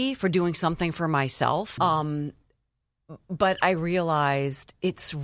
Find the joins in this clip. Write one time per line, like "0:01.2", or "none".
0:01.8